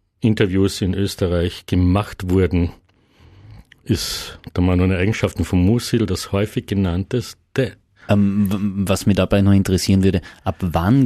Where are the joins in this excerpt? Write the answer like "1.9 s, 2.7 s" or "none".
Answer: 8.1 s